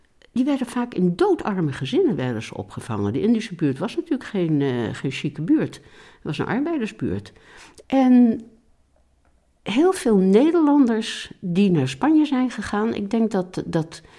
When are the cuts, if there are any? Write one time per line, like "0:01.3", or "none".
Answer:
0:07.8